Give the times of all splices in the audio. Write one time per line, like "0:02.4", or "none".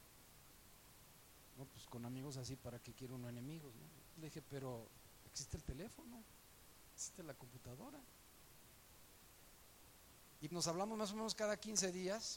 0:04.2
0:10.5